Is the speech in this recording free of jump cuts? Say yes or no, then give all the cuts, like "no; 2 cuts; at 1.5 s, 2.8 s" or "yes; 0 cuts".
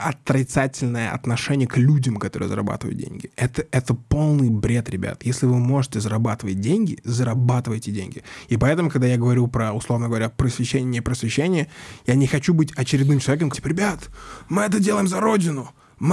no; 1 cut; at 13.5 s